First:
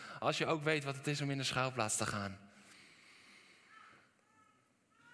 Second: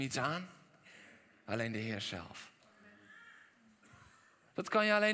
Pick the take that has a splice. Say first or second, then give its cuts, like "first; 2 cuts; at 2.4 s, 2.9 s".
second; 1 cut; at 1.5 s